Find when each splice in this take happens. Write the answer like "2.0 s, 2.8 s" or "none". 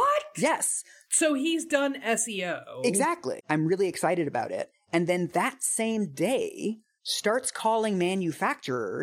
3.4 s

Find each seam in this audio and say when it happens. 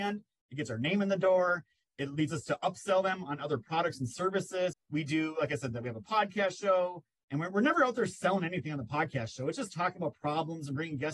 4.7 s

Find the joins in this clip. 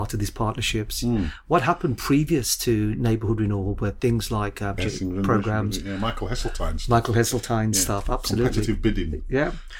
4.8 s

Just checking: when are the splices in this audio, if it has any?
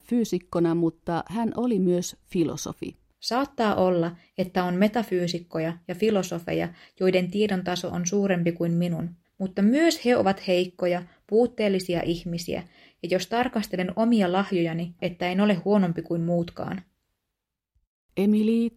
3.1 s, 9.2 s, 15.0 s

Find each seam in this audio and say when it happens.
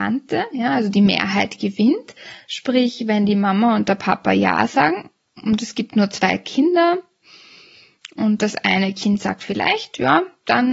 none

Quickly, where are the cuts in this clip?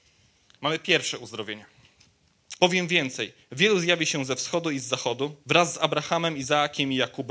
2.6 s, 5.4 s

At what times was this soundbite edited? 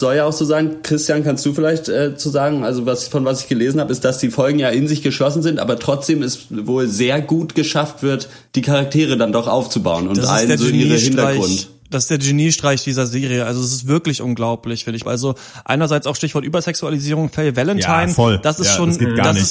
15.0 s

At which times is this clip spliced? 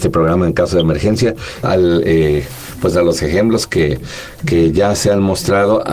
1.6 s

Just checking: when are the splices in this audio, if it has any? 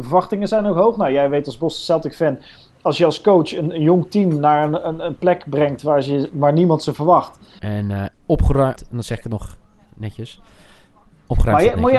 7.6 s, 8.8 s

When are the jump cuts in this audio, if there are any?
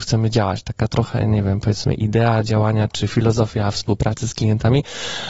2.9 s

